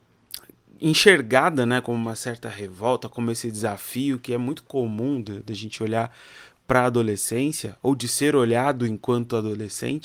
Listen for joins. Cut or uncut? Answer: uncut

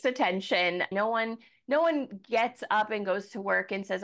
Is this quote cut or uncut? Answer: cut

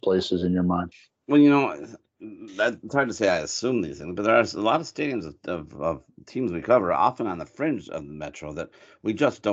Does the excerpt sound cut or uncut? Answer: uncut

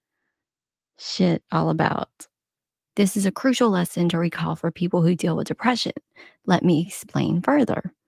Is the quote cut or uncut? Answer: cut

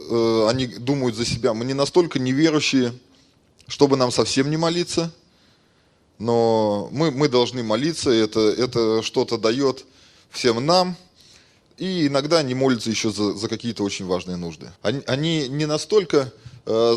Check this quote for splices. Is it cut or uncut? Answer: cut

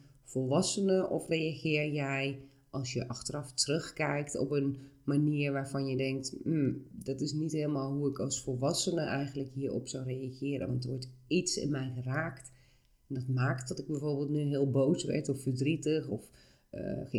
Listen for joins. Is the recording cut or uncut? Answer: uncut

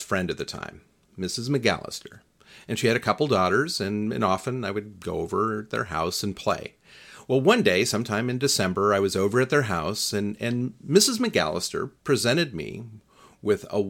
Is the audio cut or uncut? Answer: uncut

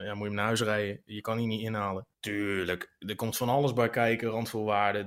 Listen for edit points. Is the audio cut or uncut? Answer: cut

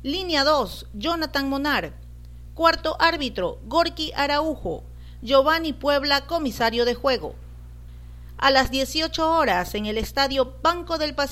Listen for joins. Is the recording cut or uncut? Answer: uncut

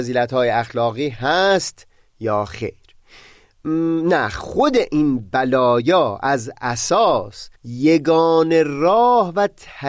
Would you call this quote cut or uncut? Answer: cut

